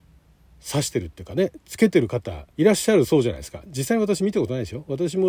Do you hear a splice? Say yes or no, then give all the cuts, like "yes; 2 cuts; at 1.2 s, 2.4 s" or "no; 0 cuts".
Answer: yes; 1 cut; at 2.5 s